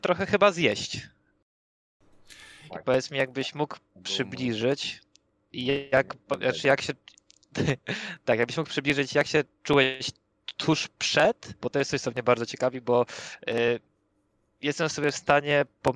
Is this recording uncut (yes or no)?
no